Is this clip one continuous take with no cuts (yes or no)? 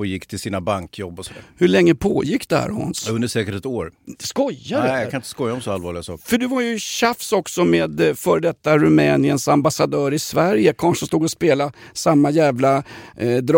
yes